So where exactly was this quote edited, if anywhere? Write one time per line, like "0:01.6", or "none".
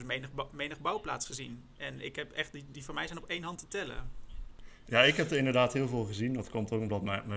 none

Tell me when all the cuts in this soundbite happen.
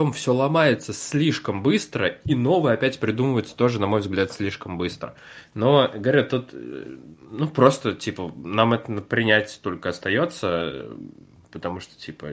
none

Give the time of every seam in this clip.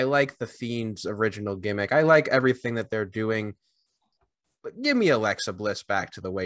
none

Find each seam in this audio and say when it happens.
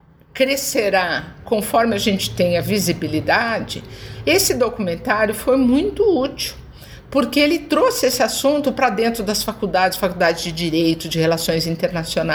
none

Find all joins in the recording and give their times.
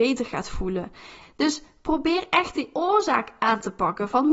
0:01.2

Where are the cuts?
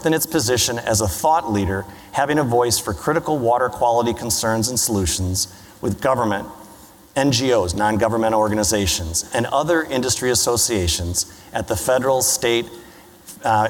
none

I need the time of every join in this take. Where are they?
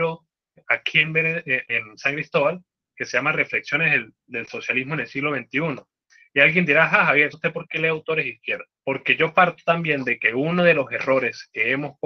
0:07.3
0:08.8

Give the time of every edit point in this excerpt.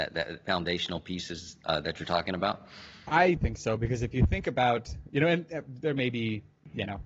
0:03.4

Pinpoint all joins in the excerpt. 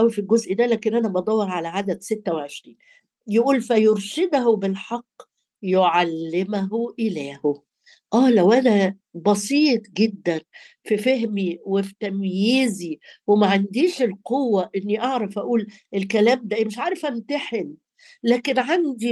none

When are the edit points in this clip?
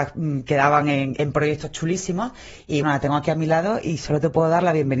0:01.2
0:02.8

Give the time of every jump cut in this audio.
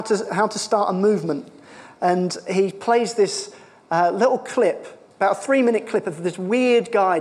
none

